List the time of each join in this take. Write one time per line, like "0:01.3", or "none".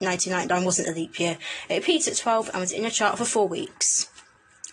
none